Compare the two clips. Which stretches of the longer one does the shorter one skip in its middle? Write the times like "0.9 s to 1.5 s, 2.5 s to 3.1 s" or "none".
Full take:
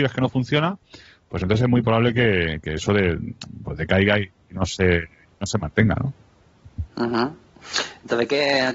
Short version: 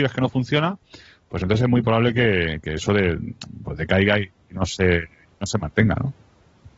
none

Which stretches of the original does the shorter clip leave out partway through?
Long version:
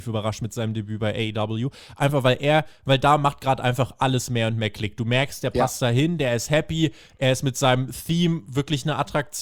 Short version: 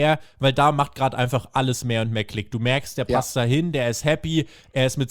none

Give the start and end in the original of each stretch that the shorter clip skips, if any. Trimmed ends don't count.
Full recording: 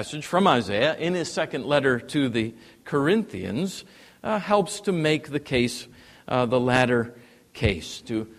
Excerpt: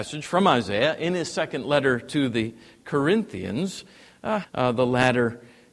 4.4 s to 6.2 s

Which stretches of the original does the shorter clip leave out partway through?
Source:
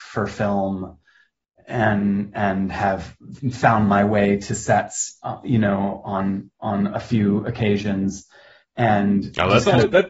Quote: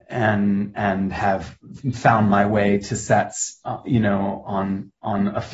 none

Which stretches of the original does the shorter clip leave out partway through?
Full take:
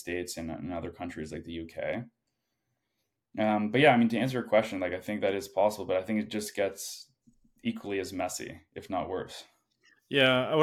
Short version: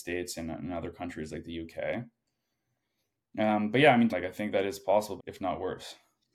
4.1 s to 4.8 s, 5.9 s to 8.7 s

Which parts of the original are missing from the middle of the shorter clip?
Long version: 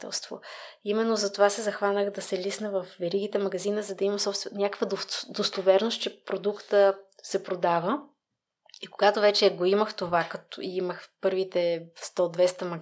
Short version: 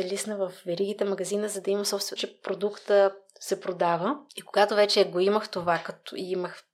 4.5 s to 6.0 s, 8.1 s to 8.7 s

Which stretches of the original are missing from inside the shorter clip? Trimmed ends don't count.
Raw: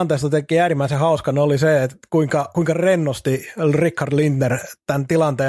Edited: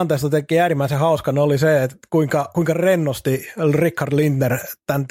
none

